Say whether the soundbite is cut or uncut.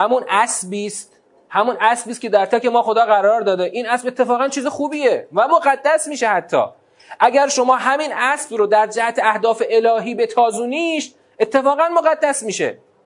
cut